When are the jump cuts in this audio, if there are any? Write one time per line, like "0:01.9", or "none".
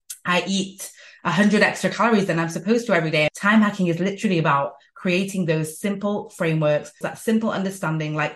0:03.3
0:07.0